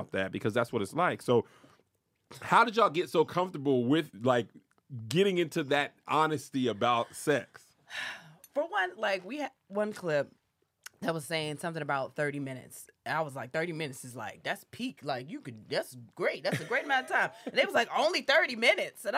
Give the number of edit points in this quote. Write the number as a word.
zero